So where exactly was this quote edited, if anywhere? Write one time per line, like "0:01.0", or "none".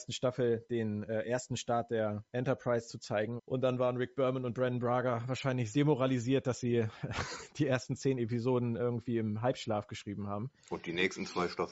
0:03.4
0:05.7